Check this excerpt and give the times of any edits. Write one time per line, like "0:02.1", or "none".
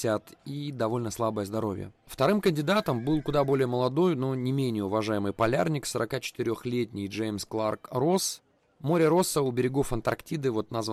0:02.0